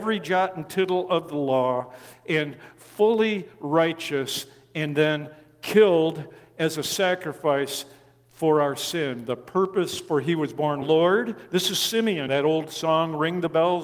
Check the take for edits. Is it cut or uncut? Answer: cut